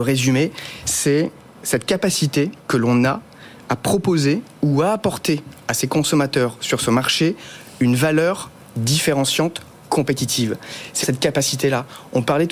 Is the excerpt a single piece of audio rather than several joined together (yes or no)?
no